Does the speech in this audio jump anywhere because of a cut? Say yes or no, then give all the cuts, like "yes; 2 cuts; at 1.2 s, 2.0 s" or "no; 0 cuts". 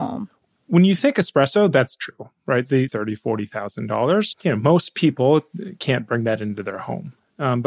yes; 2 cuts; at 2.9 s, 4.3 s